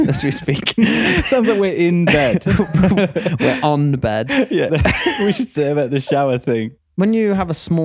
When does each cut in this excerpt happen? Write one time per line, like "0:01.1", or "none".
0:04.7
0:06.8